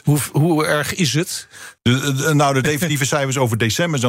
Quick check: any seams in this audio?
yes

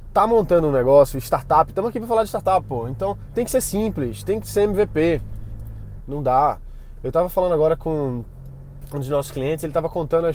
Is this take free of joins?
no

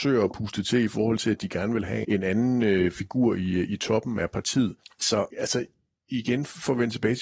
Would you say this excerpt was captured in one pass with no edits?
no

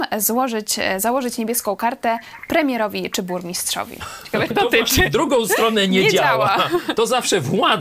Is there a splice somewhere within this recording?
yes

